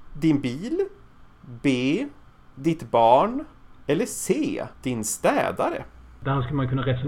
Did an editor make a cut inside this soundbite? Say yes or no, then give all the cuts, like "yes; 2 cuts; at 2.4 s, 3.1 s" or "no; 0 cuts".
yes; 1 cut; at 4.7 s